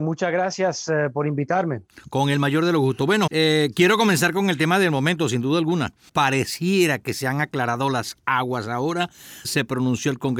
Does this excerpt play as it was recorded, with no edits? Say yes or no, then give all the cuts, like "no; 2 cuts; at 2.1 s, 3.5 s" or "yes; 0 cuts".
no; 3 cuts; at 3.3 s, 6.1 s, 9.4 s